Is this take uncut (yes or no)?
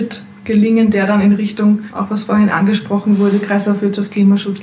yes